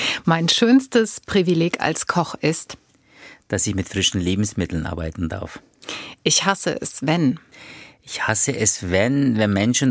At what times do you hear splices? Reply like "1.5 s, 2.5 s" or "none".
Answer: none